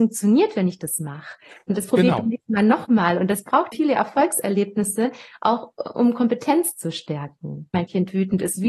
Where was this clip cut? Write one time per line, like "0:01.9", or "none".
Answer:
0:03.7
0:07.7